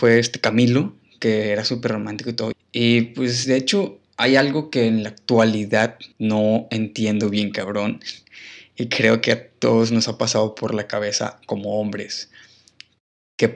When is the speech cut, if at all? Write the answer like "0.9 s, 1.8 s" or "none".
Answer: 2.5 s, 6.1 s